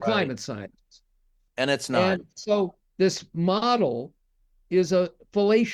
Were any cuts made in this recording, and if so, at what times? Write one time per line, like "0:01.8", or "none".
0:01.5